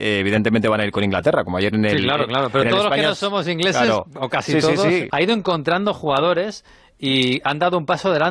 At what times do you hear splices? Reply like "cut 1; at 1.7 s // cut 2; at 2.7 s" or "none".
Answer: cut 1; at 5.1 s

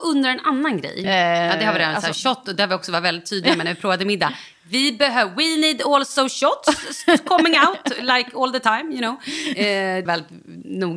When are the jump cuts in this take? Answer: cut 1; at 1.0 s // cut 2; at 10.1 s

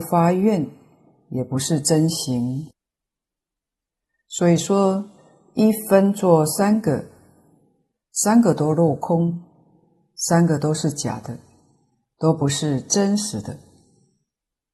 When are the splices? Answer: none

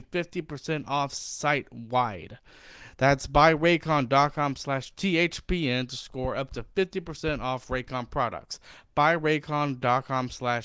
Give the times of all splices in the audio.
none

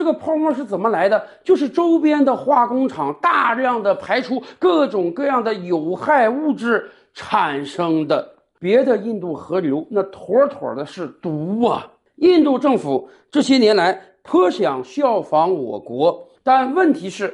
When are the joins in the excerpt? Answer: cut 1; at 8.5 s // cut 2; at 16.3 s

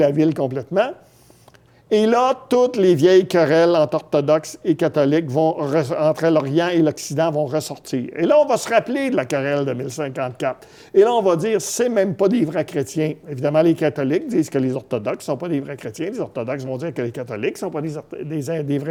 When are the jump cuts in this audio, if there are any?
none

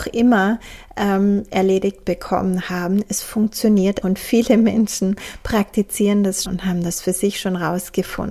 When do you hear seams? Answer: cut 1; at 4.0 s // cut 2; at 6.4 s

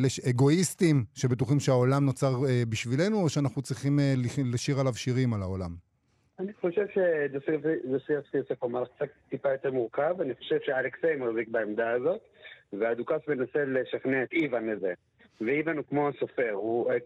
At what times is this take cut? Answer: none

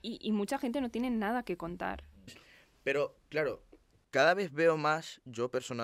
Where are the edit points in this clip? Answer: cut 1; at 2.3 s

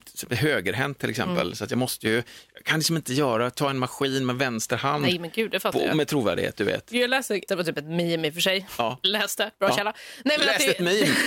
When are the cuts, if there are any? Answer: cut 1; at 7.5 s

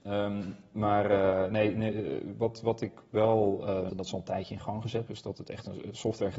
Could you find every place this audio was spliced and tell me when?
cut 1; at 3.9 s // cut 2; at 5.1 s

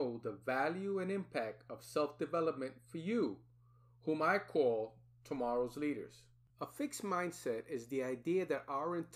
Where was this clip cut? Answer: cut 1; at 6.5 s

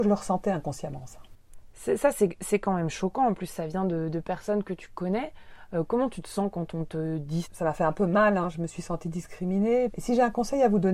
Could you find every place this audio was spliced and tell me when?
cut 1; at 7.4 s // cut 2; at 9.9 s

